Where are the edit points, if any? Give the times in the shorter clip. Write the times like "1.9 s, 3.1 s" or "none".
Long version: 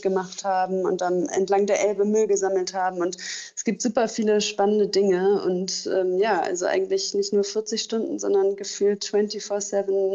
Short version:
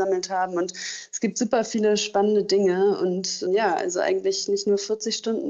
3.5 s